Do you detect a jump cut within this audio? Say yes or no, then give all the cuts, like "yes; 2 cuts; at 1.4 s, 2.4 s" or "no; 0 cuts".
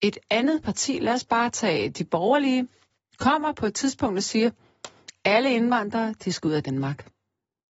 no; 0 cuts